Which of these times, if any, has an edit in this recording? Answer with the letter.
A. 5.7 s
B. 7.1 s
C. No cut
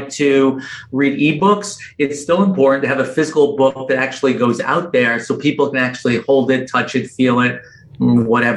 C